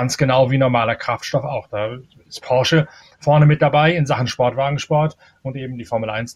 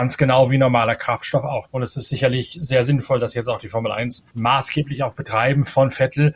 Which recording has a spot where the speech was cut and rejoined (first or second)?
second